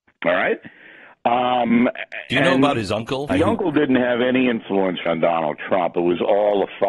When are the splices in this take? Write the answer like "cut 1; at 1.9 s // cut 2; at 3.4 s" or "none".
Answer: cut 1; at 3.3 s // cut 2; at 5.1 s